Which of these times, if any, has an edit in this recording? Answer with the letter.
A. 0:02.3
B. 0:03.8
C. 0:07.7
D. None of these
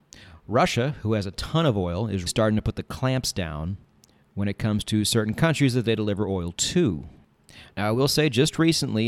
A